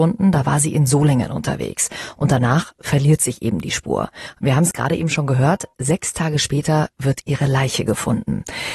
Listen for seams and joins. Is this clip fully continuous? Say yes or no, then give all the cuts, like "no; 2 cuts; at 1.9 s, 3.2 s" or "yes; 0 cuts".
yes; 0 cuts